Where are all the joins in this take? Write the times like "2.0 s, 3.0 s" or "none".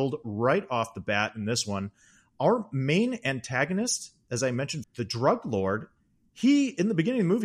4.8 s